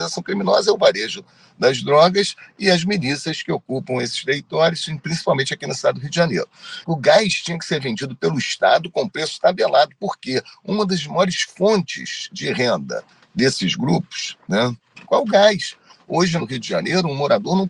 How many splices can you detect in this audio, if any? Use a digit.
3